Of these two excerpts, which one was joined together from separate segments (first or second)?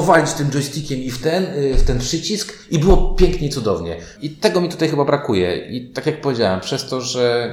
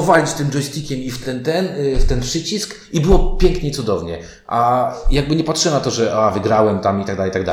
first